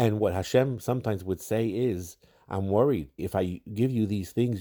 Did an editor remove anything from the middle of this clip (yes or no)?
yes